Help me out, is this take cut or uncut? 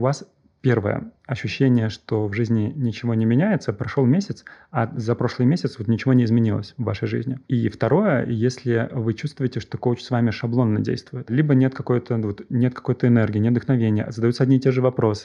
uncut